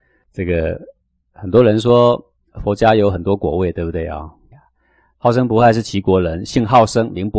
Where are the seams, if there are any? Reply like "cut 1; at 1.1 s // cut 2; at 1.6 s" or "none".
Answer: cut 1; at 4.5 s